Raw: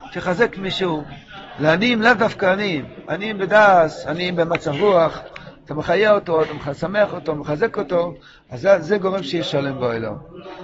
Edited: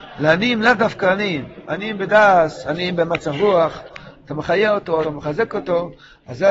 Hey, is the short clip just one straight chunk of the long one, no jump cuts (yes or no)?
no